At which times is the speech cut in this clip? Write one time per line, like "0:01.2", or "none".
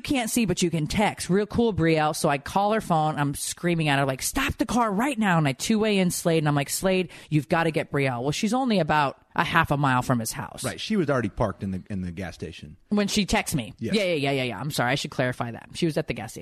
none